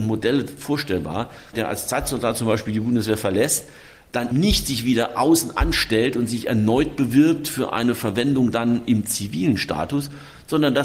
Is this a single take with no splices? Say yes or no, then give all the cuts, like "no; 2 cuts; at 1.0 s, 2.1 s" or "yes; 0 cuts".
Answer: no; 2 cuts; at 1.5 s, 4.3 s